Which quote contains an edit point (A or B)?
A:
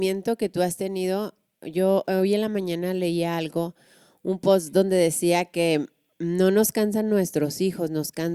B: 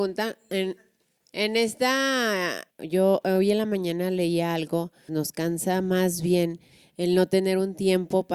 B